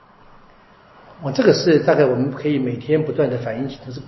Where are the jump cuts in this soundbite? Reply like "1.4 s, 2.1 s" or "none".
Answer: none